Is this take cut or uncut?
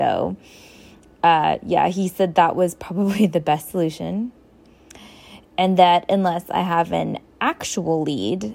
uncut